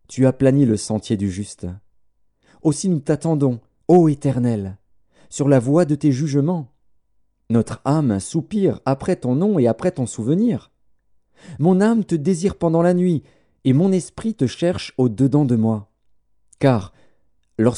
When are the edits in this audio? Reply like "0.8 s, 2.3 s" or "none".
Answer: none